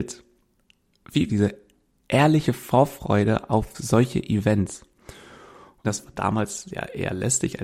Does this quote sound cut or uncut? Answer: cut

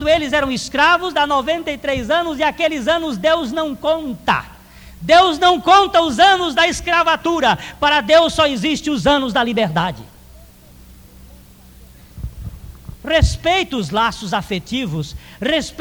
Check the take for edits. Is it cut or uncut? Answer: cut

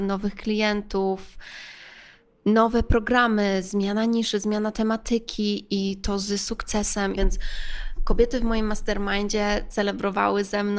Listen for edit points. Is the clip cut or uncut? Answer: cut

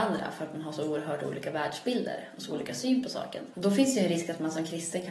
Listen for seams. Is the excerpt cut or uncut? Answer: cut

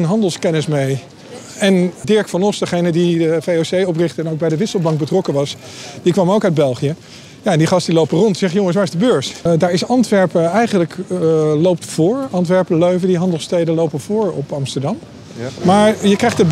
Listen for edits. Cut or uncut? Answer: cut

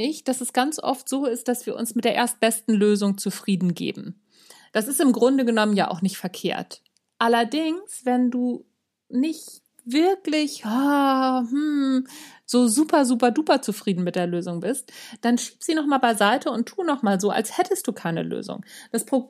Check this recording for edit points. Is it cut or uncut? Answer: uncut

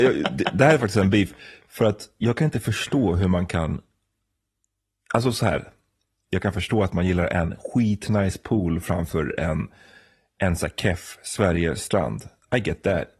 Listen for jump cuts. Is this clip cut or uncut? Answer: uncut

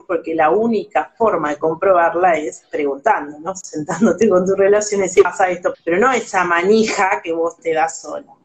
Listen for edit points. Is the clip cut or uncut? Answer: cut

